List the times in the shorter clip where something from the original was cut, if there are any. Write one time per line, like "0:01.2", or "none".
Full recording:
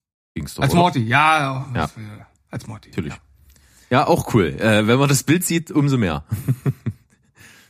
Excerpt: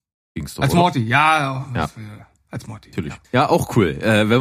0:03.2

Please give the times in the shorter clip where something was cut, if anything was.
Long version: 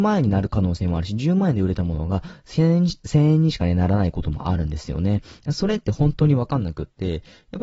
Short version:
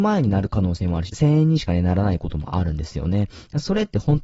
0:01.1

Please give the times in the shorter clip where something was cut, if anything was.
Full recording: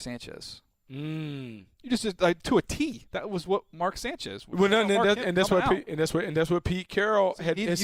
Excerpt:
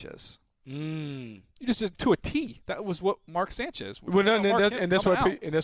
0:01.9

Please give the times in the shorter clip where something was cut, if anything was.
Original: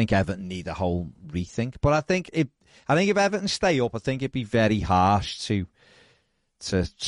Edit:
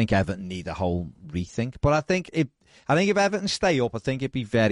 none

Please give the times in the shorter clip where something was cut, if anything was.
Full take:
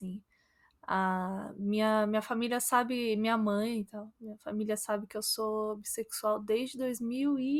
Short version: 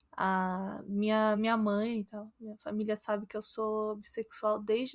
0:01.4

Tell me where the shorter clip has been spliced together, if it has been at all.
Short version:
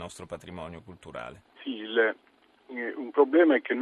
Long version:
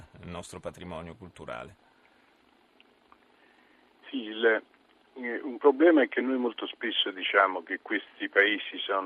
0:01.5

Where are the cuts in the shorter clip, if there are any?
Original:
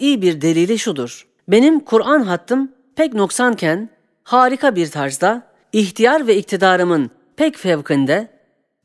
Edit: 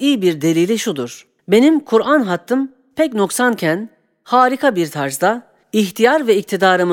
none

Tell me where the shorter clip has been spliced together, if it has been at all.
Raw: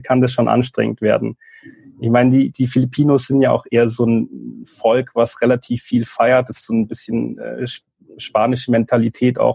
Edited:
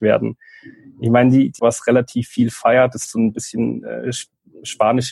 0:01.6

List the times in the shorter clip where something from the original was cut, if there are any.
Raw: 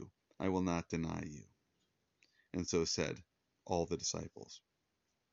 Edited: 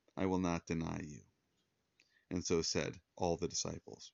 0:03.1

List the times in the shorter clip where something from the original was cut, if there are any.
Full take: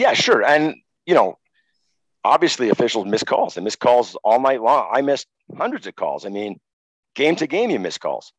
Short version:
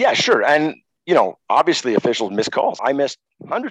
0:01.4
0:02.8

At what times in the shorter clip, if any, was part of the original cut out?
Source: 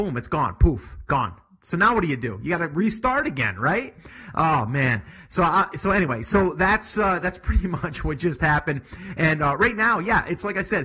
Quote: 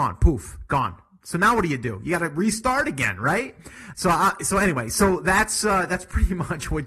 0:03.9

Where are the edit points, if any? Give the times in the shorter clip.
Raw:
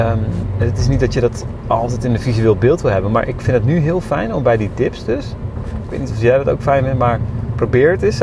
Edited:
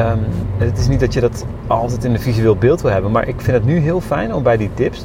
none

